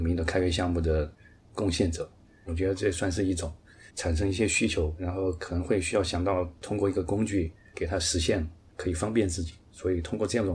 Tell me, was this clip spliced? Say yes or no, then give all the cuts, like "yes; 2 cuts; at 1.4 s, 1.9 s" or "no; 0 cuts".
yes; 2 cuts; at 2.4 s, 3.9 s